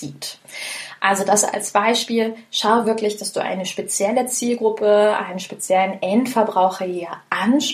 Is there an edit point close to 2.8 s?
no; 0 cuts

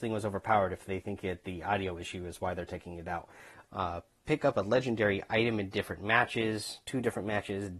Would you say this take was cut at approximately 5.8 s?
no; 1 cut; at 3.6 s

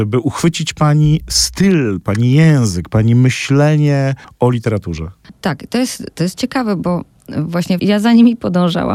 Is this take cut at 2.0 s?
no; 1 cut; at 7.8 s

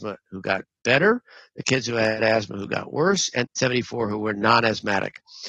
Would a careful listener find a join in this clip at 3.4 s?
yes; 1 cut; at 3.4 s

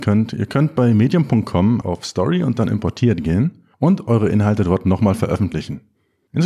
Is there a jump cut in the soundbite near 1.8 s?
yes; 2 cuts; at 1.8 s, 3.7 s

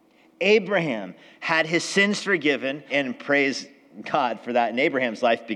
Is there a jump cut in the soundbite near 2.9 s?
yes; 1 cut; at 2.9 s

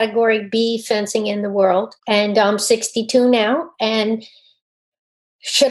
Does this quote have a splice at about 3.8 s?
no; 1 cut; at 2.0 s

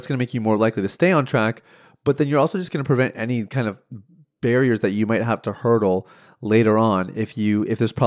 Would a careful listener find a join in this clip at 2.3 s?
no; 0 cuts

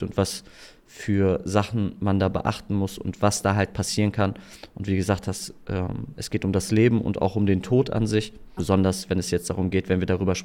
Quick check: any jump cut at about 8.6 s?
yes; 1 cut; at 8.6 s

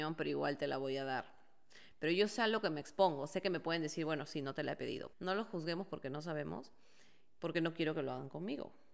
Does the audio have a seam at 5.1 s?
yes; 2 cuts; at 5.1 s, 7.4 s

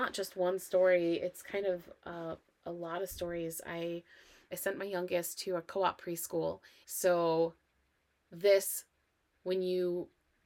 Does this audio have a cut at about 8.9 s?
no; 2 cuts; at 4.5 s, 6.8 s

